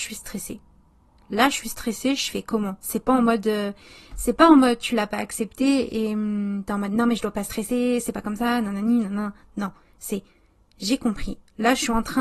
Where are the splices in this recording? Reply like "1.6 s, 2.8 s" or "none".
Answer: none

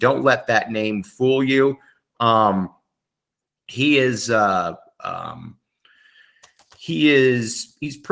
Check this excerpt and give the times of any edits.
none

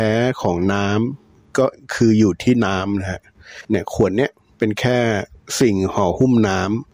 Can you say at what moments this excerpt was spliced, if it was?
3.6 s

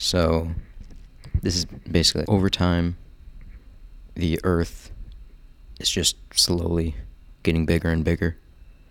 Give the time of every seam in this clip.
2.2 s

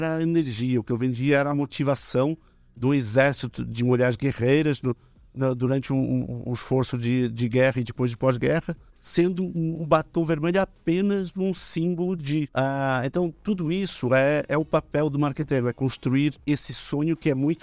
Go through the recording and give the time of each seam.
none

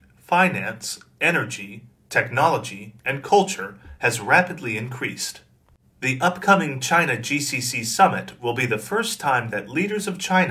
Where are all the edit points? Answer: 6.0 s

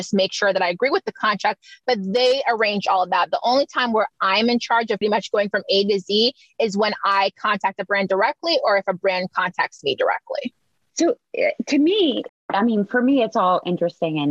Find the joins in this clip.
5.0 s, 10.9 s, 12.3 s

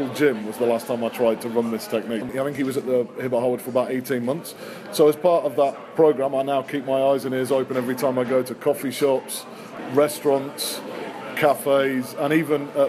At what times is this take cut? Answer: 2.2 s

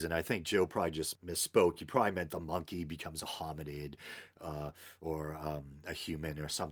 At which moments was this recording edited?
none

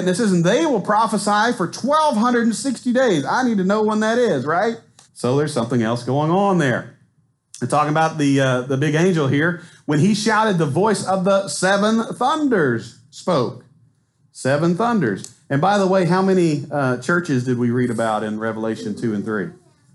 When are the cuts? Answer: 5.1 s

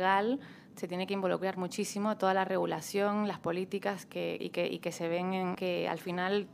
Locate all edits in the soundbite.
4.4 s, 5.5 s

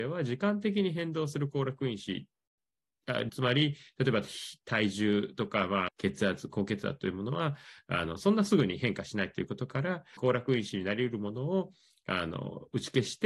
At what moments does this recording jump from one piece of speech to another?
3.3 s, 5.9 s, 10.2 s

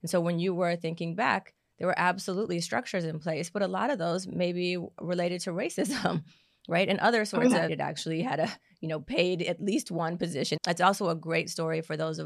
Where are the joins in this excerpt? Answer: 7.7 s, 10.6 s

